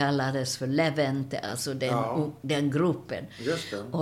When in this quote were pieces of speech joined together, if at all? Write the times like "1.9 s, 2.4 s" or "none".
none